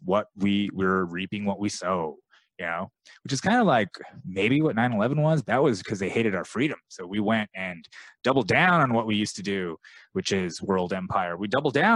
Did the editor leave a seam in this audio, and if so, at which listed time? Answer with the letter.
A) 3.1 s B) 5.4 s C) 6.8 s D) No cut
B